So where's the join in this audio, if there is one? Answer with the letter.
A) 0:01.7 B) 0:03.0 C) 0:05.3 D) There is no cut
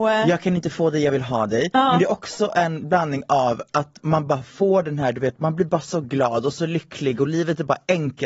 D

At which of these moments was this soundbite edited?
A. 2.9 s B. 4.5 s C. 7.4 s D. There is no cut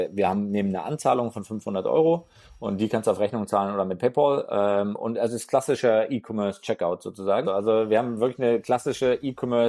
C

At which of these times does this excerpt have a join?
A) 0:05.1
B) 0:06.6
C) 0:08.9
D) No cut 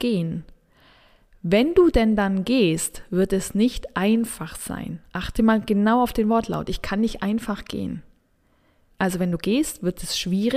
C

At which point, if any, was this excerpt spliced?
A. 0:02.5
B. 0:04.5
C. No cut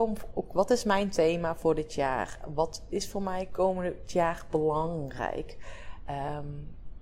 C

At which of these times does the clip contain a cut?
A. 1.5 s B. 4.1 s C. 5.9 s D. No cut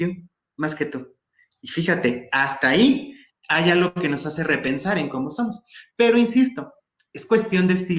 D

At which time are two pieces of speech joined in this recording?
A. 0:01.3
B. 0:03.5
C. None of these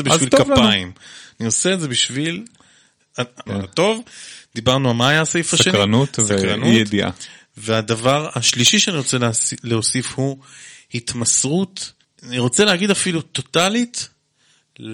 B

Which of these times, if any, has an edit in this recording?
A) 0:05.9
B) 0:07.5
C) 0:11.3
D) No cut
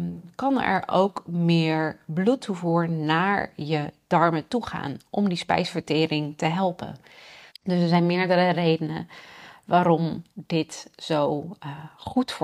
B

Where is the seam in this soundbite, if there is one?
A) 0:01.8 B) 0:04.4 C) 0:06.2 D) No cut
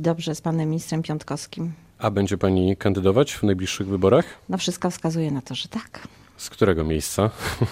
D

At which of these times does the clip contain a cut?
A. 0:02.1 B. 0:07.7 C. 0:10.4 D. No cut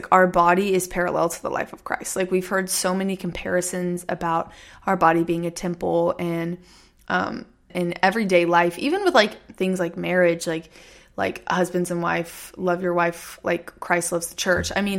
B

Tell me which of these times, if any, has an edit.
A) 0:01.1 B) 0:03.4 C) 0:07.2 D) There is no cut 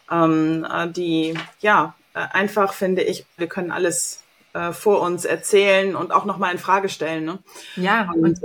B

